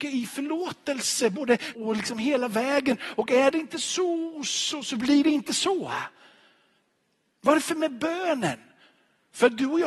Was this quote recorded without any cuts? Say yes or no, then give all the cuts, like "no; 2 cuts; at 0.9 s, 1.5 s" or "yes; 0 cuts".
no; 1 cut; at 1.7 s